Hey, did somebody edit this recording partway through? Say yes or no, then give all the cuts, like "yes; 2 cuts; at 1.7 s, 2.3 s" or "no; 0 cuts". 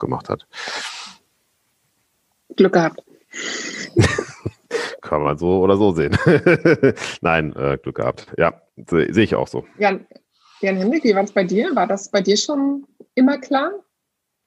no; 0 cuts